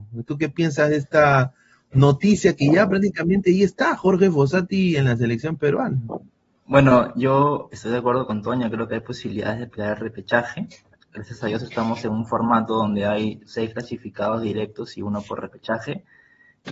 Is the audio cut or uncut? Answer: cut